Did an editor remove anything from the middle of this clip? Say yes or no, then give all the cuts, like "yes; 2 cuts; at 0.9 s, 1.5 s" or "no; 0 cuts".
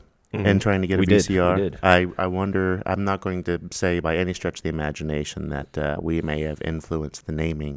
no; 0 cuts